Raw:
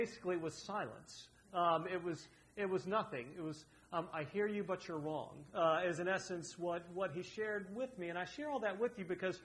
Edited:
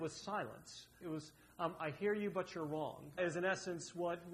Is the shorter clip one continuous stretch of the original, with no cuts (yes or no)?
no